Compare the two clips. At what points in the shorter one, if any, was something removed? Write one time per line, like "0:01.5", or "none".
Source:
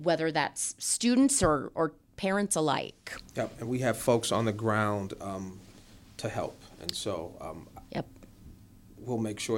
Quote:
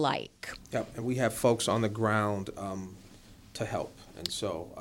none